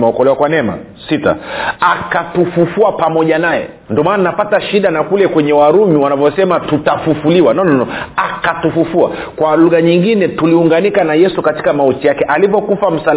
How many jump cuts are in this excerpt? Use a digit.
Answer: 1